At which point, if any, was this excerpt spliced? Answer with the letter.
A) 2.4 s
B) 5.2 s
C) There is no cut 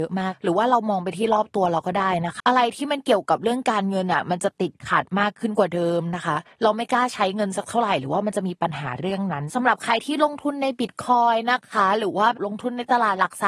A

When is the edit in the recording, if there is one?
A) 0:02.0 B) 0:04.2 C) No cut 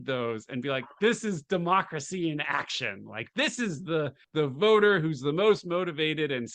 B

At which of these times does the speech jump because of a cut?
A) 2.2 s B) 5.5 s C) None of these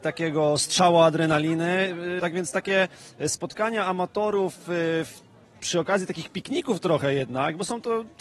A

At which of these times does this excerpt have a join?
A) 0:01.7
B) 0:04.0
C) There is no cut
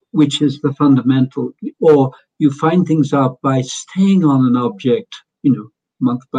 A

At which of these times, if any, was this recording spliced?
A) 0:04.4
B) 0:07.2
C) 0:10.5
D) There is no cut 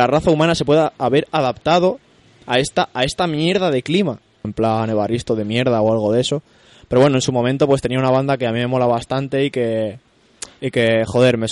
A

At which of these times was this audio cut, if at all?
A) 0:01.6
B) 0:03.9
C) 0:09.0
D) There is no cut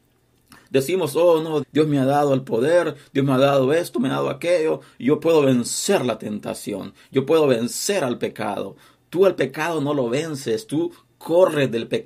A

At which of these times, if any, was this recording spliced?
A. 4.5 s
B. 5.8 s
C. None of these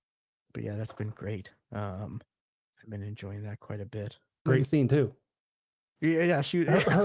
A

